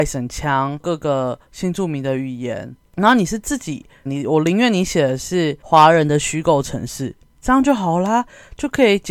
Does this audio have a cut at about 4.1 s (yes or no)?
yes